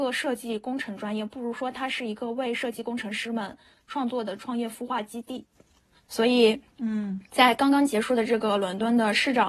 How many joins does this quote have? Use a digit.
0